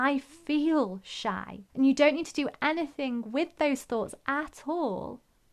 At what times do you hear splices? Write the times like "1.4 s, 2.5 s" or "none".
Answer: 1.7 s